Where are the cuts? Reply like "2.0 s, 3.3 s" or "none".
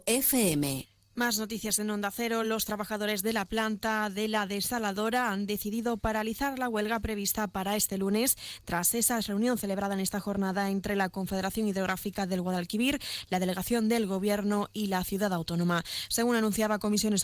none

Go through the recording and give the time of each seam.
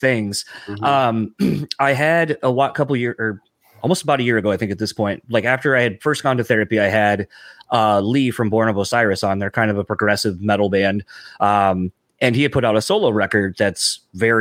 none

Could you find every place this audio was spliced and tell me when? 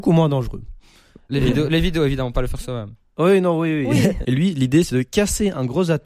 4.2 s

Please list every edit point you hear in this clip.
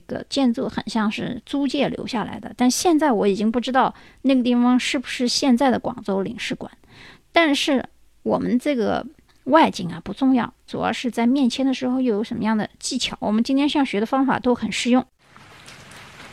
10.7 s, 13.2 s

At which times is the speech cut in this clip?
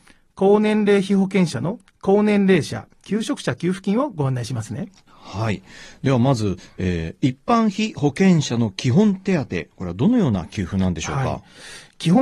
1.9 s

